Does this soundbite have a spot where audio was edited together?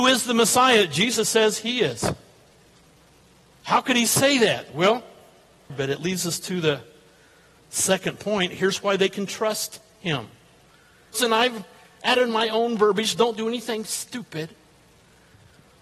yes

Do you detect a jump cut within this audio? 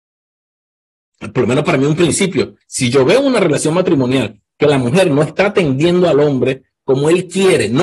yes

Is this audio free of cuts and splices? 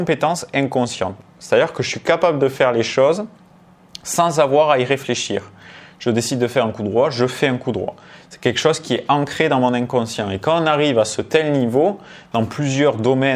yes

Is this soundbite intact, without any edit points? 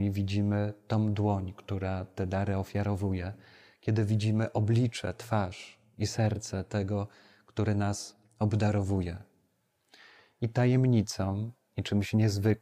yes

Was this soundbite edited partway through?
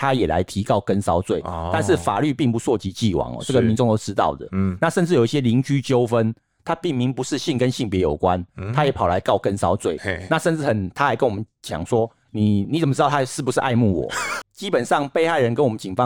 yes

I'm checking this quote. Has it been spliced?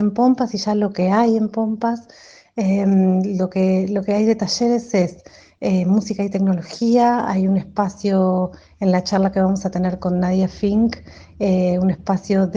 no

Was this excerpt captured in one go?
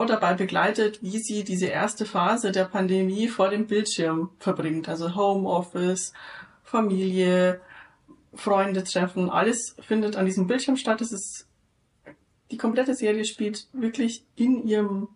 yes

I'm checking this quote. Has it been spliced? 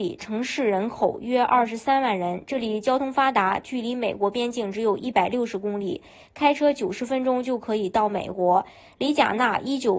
no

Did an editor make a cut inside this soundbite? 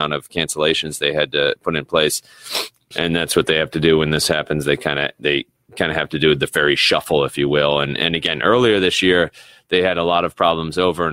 yes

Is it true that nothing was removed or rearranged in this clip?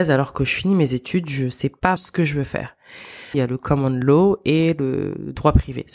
no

